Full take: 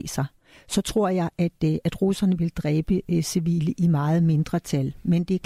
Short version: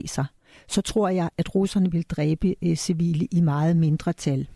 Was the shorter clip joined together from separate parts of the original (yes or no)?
yes